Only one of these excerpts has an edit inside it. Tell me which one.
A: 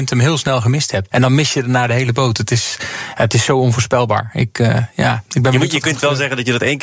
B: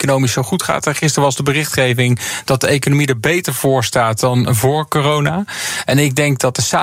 A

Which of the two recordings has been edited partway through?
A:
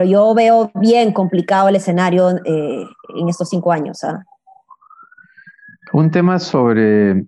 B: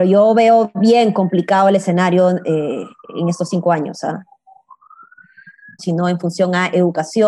B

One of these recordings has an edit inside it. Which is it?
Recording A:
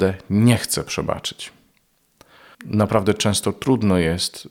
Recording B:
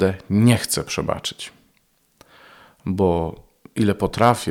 A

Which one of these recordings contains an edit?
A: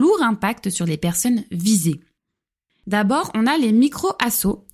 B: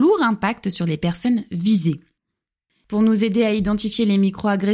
A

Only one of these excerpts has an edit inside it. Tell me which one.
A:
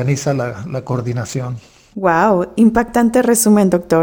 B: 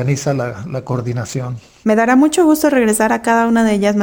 B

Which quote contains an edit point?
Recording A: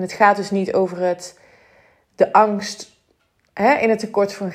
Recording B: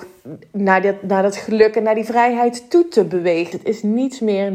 B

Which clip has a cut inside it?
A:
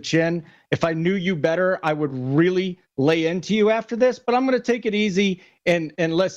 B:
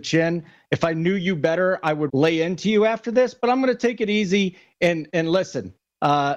B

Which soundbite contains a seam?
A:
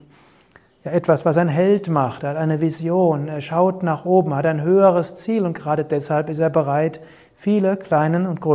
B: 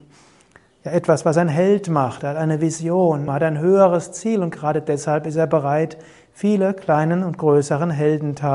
B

